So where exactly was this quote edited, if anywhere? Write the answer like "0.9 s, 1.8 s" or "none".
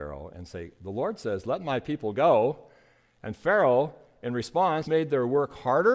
4.8 s